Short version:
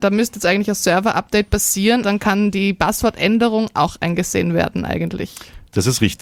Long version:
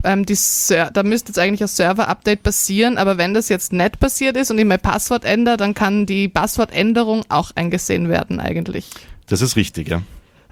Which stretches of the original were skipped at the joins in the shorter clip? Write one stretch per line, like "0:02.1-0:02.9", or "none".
0:03.0-0:05.6